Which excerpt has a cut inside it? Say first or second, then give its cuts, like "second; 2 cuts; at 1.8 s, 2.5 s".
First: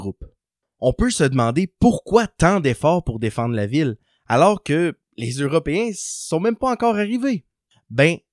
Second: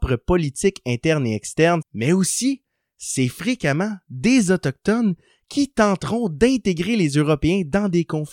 second; 1 cut; at 1.8 s